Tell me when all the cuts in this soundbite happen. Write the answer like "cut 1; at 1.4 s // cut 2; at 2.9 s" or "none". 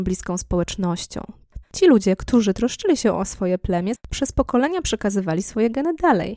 cut 1; at 1.6 s // cut 2; at 3.9 s